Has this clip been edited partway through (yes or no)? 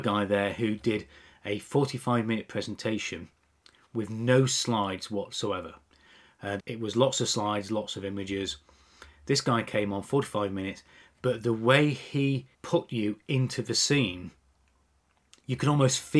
yes